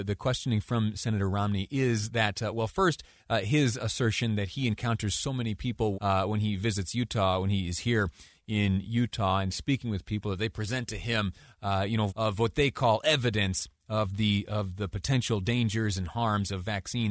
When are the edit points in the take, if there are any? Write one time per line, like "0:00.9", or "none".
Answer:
0:05.9
0:12.1

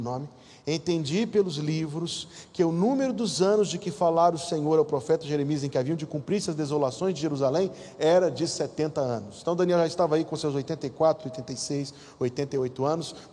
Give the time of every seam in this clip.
none

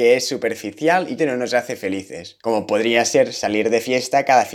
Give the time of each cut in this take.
0:01.2
0:02.4

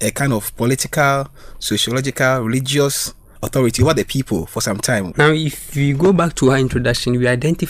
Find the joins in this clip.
0:03.4
0:05.1

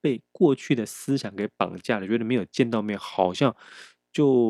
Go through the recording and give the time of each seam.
none

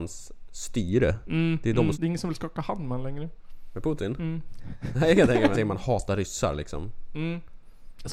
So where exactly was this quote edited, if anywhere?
0:01.9
0:05.5

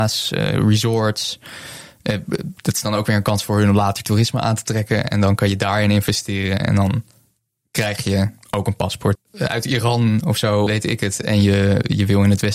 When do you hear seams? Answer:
0:09.1
0:10.7

